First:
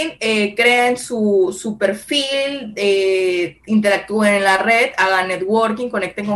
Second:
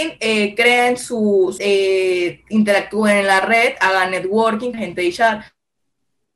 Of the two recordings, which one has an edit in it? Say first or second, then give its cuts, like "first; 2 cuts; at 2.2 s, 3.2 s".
second; 2 cuts; at 1.6 s, 4.7 s